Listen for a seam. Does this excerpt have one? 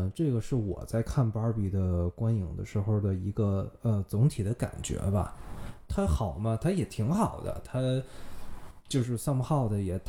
no; 0 cuts

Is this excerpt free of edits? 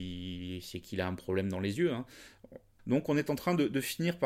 no; 1 cut; at 2.8 s

